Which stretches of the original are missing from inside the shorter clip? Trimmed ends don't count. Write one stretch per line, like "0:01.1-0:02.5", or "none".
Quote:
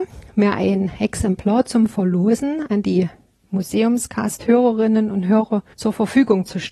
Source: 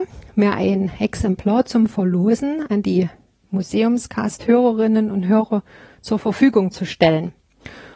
0:05.7-0:06.0